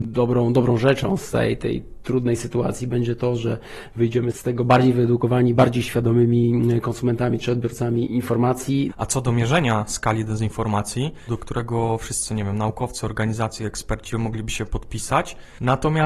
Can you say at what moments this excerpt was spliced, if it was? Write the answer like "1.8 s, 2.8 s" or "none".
8.9 s, 11.3 s